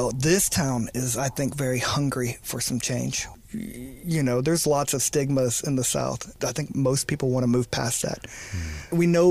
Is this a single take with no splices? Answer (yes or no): yes